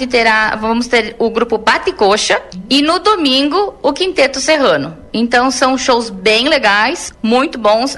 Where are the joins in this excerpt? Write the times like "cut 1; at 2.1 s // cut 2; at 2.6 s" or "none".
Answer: none